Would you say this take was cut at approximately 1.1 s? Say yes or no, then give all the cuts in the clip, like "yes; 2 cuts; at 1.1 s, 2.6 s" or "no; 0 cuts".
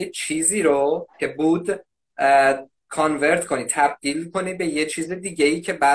yes; 1 cut; at 1.1 s